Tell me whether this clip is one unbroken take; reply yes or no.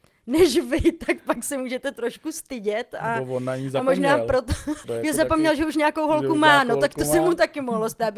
no